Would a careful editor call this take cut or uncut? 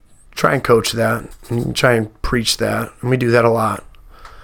uncut